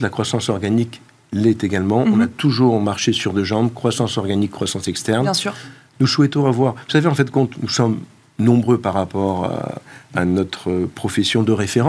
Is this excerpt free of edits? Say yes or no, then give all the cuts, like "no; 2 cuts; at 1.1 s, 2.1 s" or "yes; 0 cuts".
no; 1 cut; at 5.9 s